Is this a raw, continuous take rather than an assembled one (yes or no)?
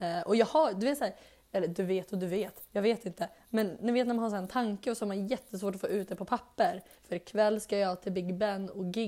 no